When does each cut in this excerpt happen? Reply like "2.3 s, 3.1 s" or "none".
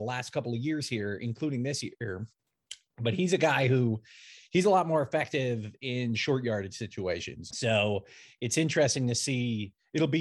7.5 s